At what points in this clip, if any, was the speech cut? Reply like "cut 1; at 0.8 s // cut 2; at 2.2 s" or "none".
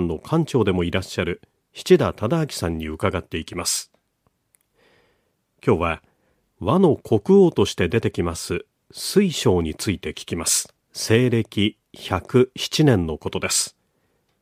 cut 1; at 10.8 s